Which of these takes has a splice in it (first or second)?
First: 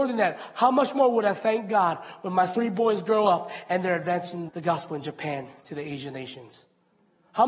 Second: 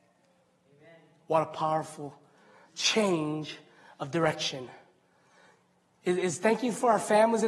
first